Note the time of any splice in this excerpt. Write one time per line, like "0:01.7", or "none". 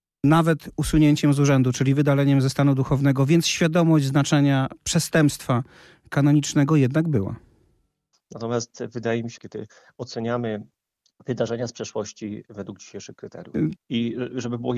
0:08.1
0:09.4
0:13.7